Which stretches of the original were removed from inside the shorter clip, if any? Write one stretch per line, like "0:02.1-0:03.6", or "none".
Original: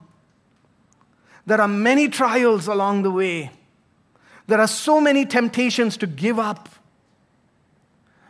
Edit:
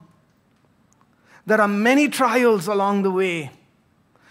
none